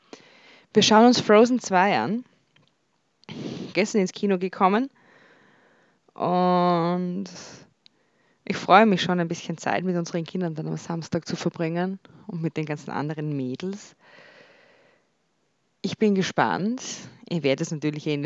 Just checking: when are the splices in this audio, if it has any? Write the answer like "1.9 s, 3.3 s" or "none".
3.7 s